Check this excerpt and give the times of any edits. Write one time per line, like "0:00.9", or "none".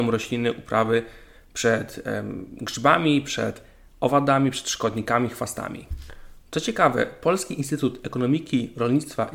0:06.4